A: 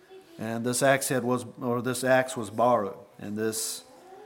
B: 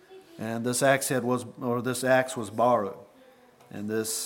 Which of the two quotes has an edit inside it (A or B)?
A